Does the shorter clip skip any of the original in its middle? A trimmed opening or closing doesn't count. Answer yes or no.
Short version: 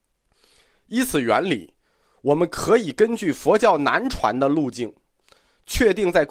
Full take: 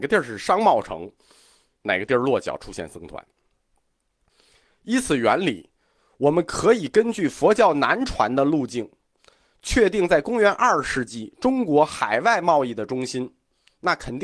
no